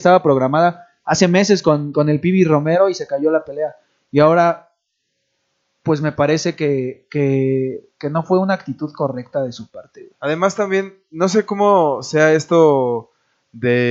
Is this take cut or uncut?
uncut